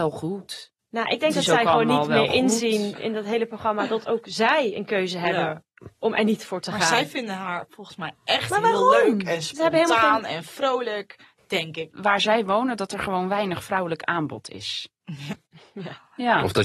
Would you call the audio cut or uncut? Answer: cut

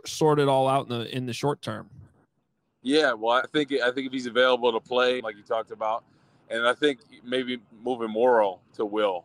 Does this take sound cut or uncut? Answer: cut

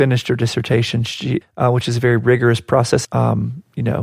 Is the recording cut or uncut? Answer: cut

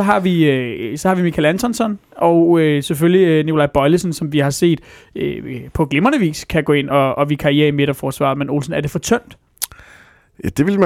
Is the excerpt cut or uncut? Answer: uncut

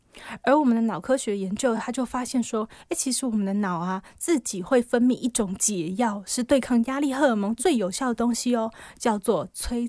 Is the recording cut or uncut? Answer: uncut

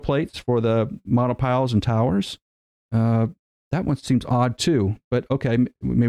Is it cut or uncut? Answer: uncut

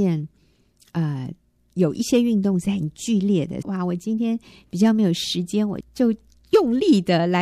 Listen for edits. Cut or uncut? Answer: cut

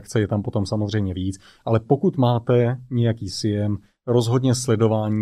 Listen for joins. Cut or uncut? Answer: uncut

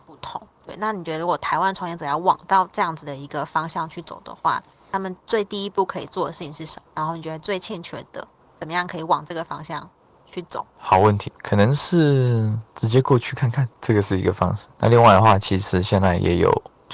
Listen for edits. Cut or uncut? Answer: uncut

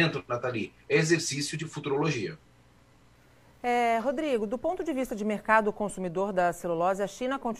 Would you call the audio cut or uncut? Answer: uncut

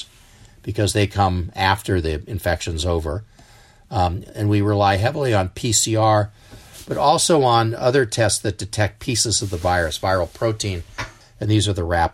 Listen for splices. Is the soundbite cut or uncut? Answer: cut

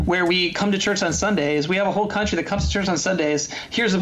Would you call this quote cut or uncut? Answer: uncut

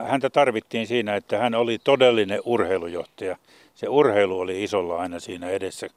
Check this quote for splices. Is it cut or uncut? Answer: uncut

